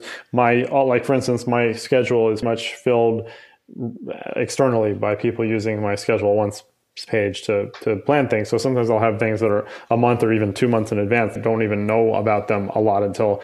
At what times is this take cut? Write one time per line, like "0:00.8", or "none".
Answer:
0:02.4
0:11.4